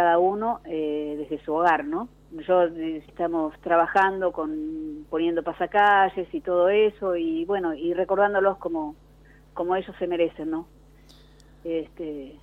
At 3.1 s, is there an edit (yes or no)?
yes